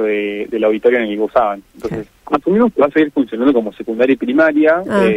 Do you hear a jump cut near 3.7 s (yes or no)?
no